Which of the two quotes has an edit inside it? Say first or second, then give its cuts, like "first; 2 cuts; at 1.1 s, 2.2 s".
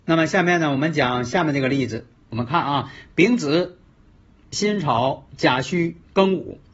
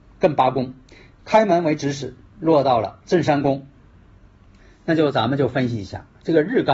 first; 1 cut; at 2.3 s